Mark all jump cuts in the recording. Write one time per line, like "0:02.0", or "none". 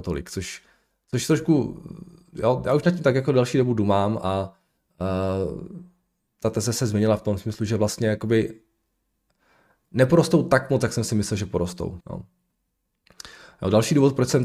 0:12.0